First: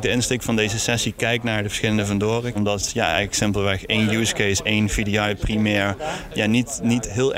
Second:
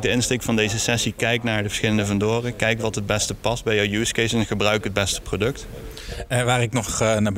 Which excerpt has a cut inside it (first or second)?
first